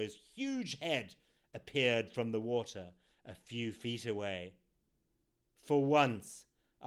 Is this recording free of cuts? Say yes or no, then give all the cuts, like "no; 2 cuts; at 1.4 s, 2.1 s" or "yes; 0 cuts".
yes; 0 cuts